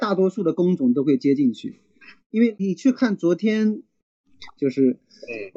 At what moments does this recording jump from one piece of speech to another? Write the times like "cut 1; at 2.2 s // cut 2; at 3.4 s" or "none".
cut 1; at 2.6 s // cut 2; at 4.6 s